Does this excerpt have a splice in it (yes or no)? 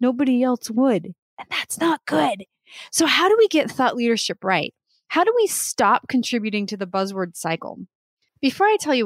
no